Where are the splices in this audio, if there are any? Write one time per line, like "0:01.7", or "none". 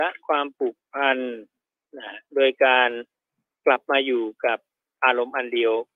none

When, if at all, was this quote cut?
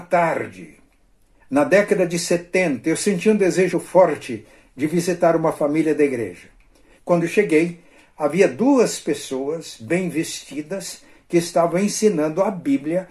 0:03.7
0:07.0

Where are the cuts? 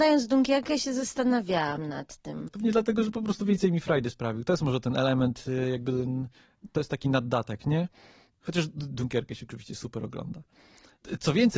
0:02.5

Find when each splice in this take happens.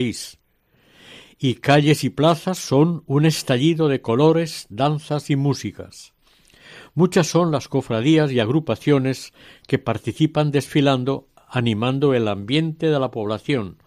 none

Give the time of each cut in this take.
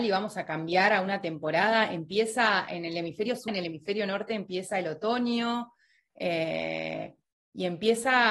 0:03.5

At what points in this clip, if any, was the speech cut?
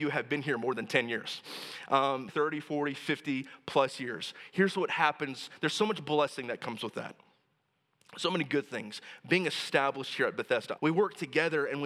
0:02.3
0:10.8

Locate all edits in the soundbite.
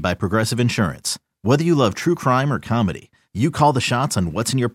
0:03.2

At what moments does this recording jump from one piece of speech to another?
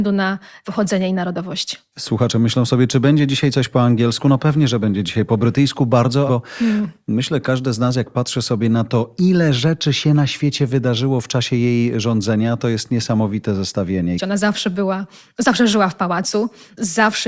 0:06.3
0:14.2

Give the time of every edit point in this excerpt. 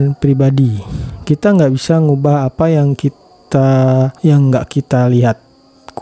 0:04.2

